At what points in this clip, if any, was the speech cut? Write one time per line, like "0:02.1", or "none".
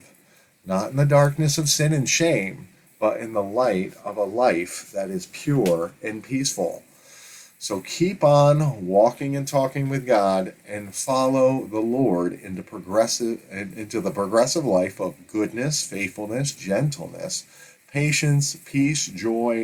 none